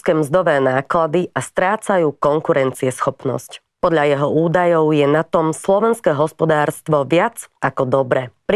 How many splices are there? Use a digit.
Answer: 1